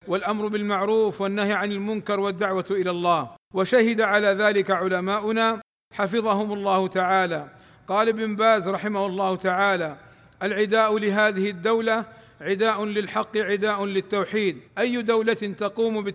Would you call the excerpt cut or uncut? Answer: cut